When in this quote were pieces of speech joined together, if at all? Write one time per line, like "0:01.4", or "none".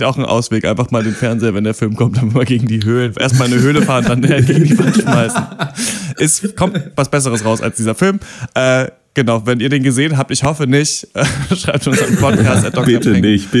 none